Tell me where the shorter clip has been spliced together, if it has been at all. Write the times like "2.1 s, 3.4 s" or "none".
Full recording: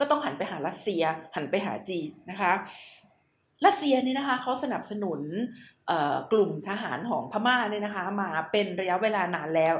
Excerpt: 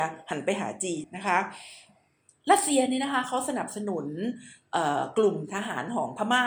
1.0 s